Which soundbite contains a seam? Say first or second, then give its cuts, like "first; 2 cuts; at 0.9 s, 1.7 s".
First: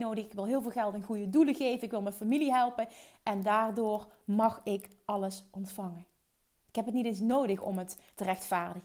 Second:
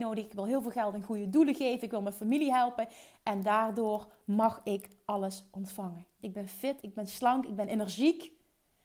second; 1 cut; at 6.2 s